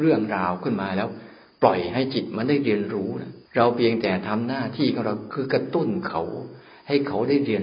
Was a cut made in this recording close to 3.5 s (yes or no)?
yes